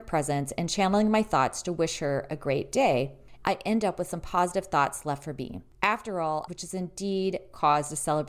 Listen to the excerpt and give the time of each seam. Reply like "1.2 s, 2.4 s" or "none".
3.4 s, 6.5 s

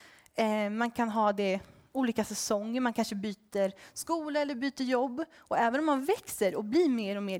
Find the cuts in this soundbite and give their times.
none

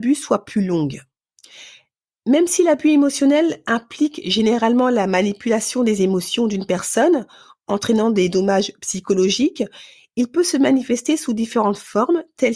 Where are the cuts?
none

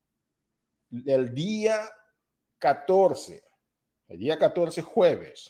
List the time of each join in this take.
none

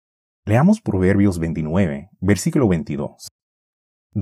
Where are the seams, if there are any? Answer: none

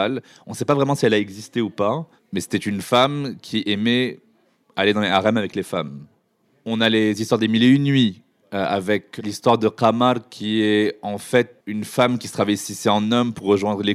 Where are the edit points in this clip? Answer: 11.6 s

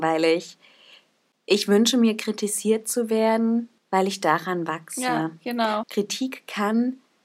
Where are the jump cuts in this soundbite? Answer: 3.8 s, 5.8 s

